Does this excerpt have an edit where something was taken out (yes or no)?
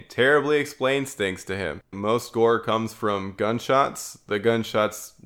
yes